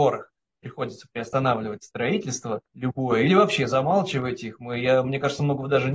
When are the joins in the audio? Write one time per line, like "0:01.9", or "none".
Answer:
0:02.7